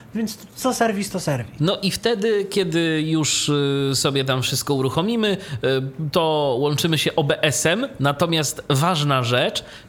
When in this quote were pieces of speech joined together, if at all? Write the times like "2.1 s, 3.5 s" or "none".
1.6 s